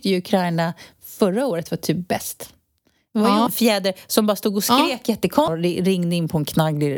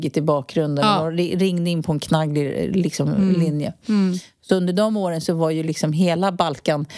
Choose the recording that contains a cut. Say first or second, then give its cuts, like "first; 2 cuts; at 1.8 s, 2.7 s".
first; 2 cuts; at 3.5 s, 5.5 s